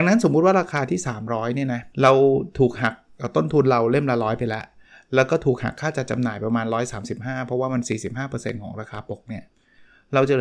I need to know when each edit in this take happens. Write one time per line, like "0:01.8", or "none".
0:01.9